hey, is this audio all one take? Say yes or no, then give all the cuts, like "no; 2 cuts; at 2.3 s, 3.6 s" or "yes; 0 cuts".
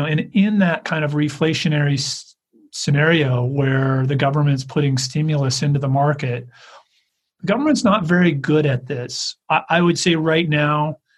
no; 1 cut; at 9.4 s